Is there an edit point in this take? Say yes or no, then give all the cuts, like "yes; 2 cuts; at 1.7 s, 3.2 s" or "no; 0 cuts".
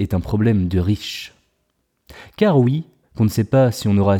yes; 1 cut; at 3.0 s